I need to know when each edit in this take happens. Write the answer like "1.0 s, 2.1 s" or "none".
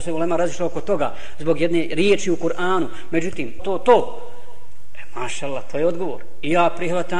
3.6 s